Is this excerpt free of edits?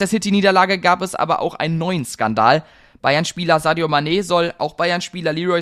yes; 0 cuts

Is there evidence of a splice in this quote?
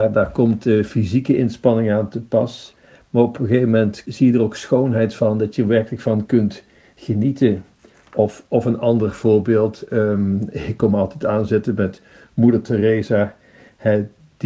no; 0 cuts

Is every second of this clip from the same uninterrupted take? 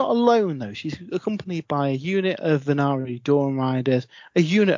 yes; 0 cuts

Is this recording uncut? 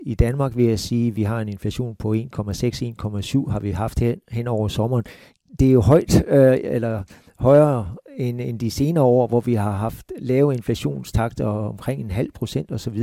yes; 0 cuts

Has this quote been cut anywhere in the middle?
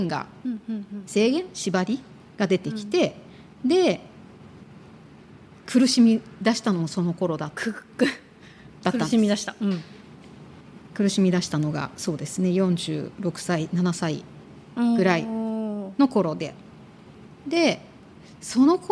no; 0 cuts

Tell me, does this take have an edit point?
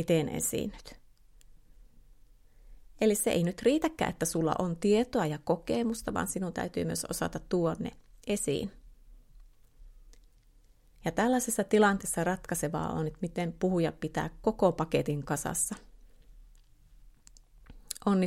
no; 0 cuts

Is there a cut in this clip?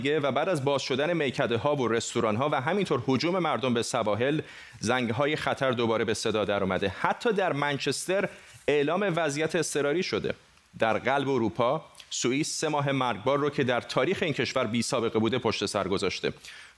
no; 0 cuts

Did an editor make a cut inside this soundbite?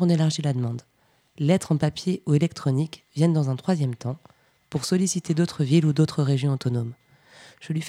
no; 0 cuts

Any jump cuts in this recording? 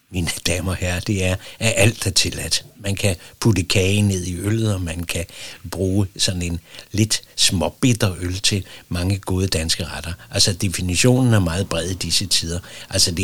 no; 0 cuts

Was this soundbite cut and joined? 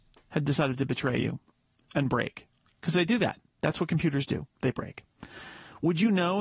no; 0 cuts

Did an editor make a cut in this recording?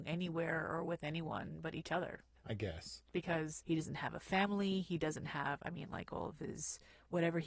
no; 0 cuts

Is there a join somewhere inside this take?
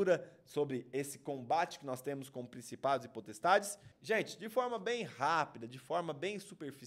yes; 1 cut; at 3.9 s

